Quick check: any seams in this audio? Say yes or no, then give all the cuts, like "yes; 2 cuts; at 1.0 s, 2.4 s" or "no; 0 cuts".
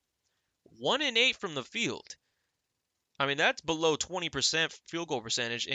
no; 0 cuts